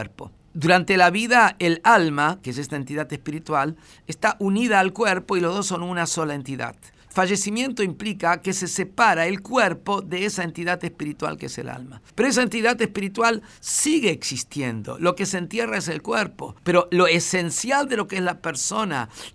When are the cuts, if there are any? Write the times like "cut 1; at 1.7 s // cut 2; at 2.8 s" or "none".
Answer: none